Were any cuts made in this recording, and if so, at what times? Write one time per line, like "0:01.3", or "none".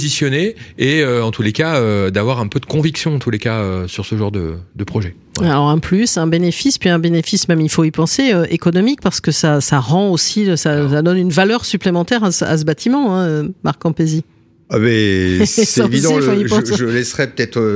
none